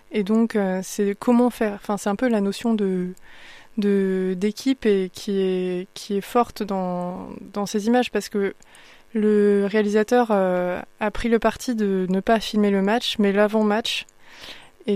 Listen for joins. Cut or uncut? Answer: uncut